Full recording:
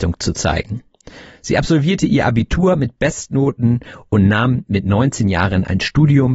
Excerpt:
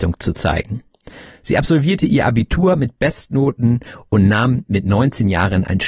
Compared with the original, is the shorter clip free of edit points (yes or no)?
yes